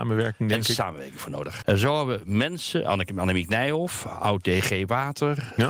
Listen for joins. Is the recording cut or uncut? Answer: cut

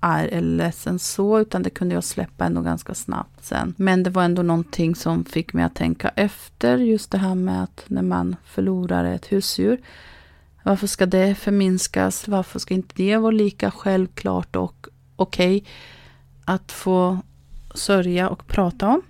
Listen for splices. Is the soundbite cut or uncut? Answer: uncut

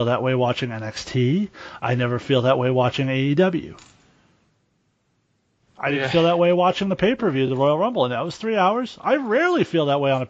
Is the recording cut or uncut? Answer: uncut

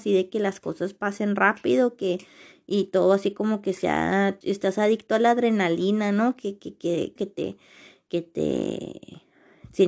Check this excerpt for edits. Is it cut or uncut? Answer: cut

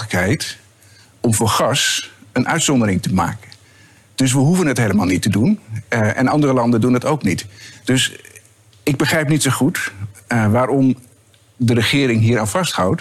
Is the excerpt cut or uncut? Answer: uncut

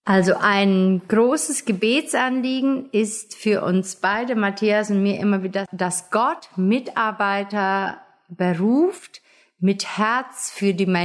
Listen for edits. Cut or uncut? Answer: uncut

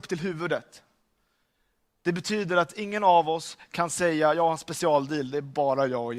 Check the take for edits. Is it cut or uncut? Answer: uncut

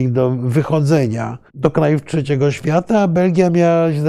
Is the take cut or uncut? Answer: cut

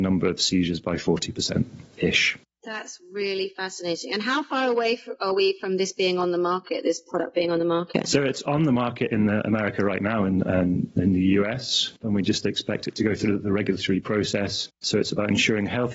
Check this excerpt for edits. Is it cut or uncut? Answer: cut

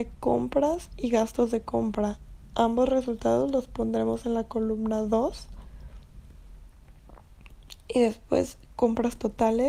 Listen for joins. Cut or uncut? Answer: uncut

